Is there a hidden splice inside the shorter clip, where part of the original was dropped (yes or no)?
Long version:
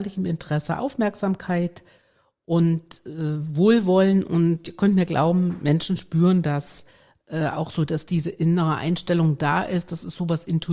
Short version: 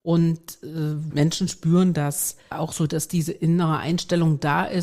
yes